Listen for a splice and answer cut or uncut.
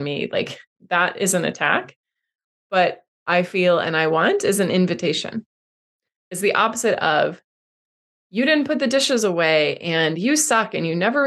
cut